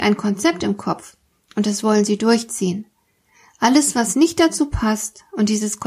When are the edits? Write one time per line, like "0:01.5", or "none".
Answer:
none